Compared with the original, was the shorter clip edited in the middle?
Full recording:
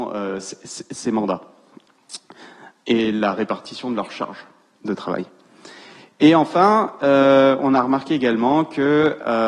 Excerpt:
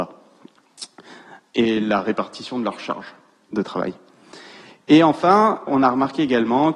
yes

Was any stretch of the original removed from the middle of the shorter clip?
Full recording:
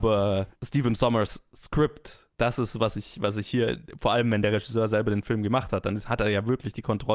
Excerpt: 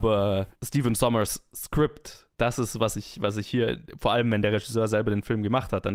no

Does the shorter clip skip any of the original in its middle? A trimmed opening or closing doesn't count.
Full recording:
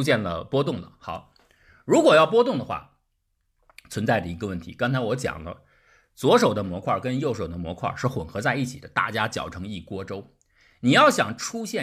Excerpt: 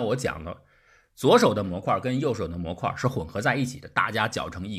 no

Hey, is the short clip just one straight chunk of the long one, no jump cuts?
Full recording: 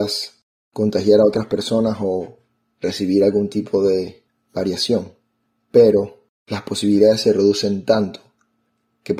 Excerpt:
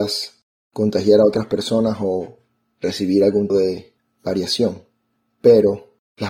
no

